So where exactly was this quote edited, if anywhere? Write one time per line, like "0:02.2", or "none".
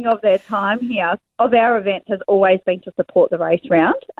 0:01.2